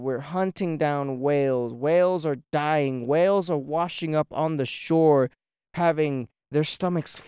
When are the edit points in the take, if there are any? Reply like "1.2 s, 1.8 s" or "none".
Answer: none